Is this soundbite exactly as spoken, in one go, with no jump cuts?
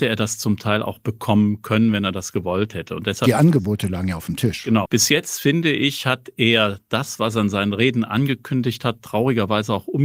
no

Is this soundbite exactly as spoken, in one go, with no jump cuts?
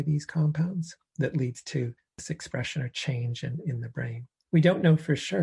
no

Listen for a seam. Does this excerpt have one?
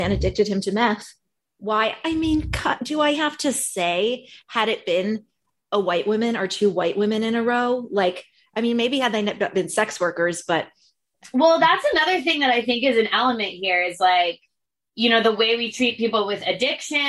yes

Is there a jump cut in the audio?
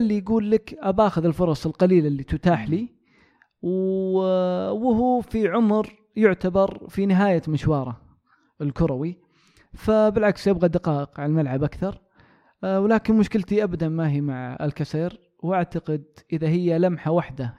no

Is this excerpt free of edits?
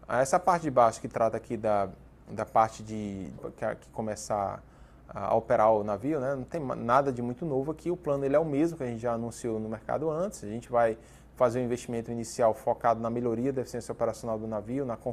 no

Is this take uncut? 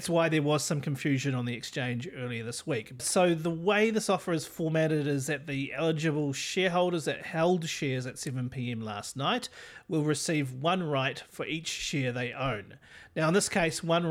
no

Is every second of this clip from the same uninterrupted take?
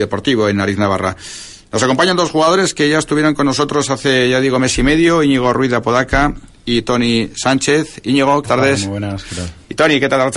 no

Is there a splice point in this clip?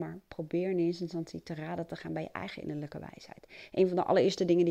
no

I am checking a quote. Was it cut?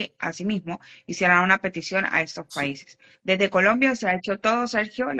no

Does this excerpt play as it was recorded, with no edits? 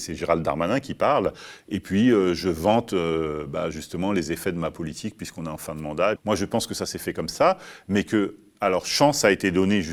no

